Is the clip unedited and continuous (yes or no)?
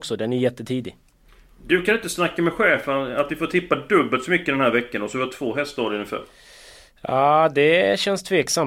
yes